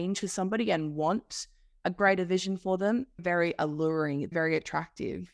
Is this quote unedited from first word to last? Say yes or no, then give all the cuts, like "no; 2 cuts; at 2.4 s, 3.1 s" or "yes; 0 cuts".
no; 2 cuts; at 3.2 s, 4.3 s